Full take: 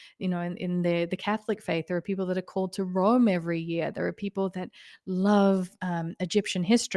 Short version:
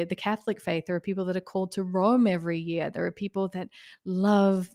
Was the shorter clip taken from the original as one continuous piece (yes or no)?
yes